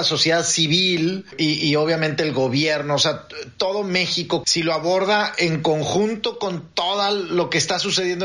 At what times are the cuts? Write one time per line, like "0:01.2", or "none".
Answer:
0:04.4

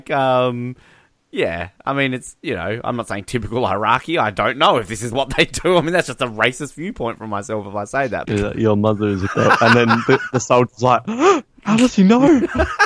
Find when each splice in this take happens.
0:08.3

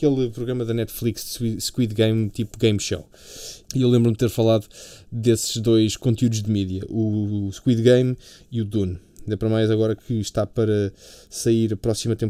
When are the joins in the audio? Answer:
0:03.6

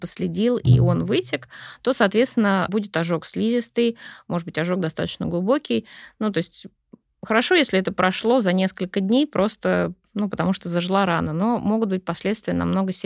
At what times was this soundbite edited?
none

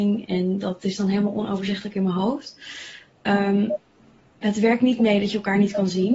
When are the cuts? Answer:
none

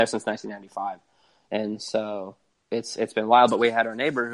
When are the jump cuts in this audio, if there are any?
none

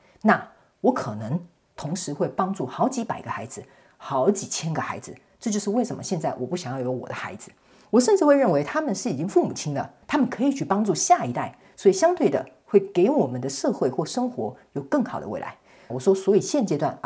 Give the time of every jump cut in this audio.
0:10.0
0:15.9

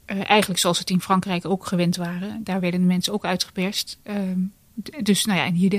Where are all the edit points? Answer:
none

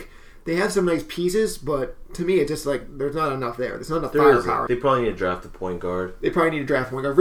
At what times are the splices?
0:04.7

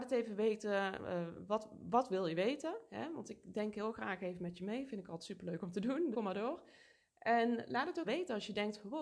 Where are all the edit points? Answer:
0:06.1
0:08.0

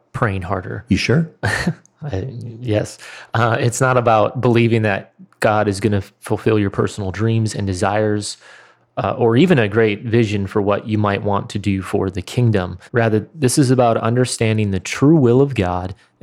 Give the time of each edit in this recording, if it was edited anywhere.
0:12.9

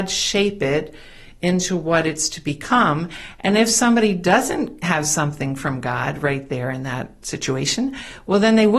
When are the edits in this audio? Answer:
none

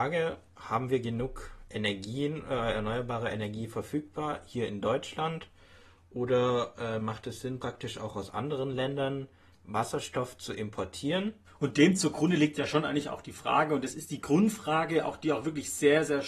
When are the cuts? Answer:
0:11.5

